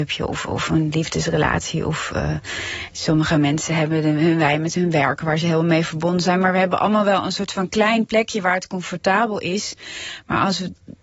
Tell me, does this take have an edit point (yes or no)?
no